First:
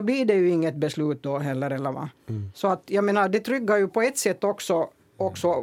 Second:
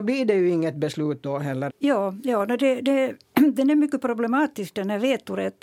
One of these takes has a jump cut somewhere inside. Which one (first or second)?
second